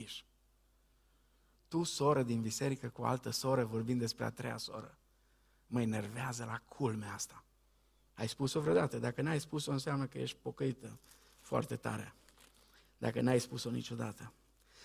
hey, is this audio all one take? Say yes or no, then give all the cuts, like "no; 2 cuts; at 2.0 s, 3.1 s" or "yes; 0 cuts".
yes; 0 cuts